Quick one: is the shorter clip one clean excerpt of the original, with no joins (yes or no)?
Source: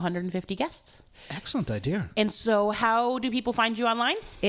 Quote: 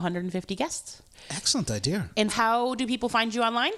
no